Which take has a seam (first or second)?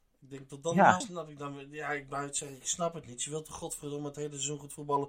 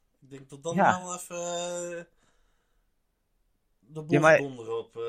first